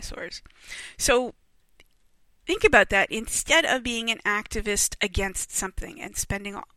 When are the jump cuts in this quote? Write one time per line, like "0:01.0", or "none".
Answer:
none